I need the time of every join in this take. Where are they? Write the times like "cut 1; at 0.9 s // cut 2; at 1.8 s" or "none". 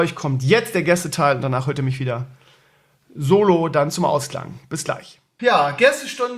cut 1; at 5.4 s